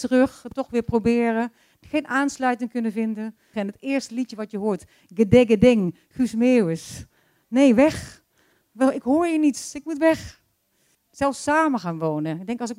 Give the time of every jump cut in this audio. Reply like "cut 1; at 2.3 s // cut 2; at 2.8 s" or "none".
cut 1; at 3.5 s // cut 2; at 10.9 s